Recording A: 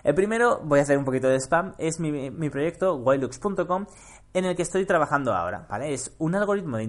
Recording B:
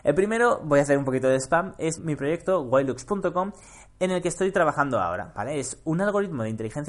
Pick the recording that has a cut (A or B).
B